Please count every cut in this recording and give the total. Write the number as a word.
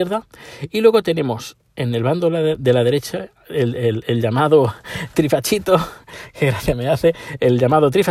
zero